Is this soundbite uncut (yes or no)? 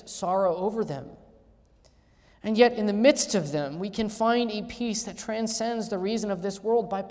yes